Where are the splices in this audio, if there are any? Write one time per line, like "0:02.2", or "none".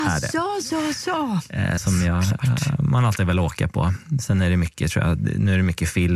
0:01.8

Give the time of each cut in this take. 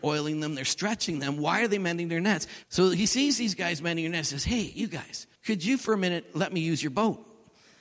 0:02.6
0:05.4

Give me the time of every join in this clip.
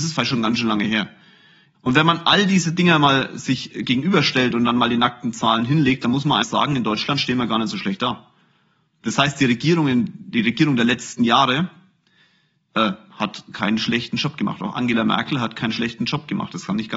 0:01.7
0:06.4

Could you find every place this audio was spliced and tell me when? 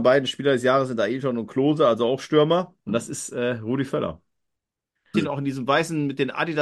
0:02.8
0:05.1

